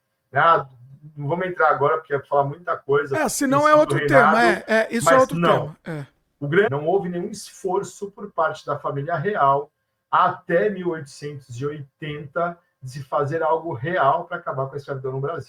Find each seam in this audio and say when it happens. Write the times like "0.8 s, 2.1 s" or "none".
6.7 s